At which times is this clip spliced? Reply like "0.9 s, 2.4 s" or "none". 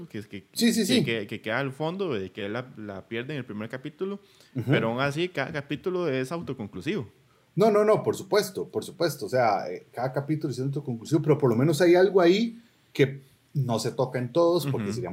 none